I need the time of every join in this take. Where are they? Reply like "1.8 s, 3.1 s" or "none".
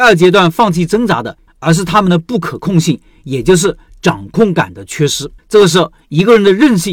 1.5 s, 5.4 s